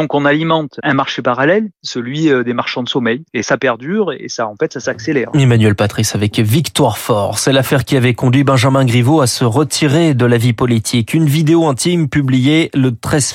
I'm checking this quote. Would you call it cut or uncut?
cut